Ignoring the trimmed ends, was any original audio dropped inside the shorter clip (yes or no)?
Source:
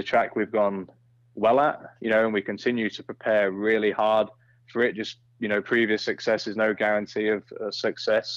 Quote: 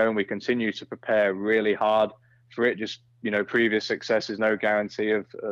no